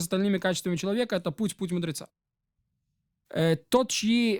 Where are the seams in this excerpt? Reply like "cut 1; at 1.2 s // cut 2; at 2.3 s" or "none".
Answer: none